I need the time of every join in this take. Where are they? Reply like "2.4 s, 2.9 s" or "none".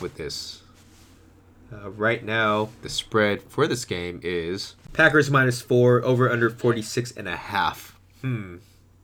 none